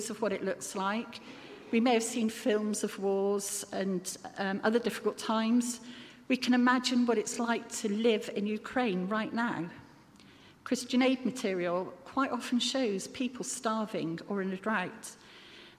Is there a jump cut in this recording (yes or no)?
no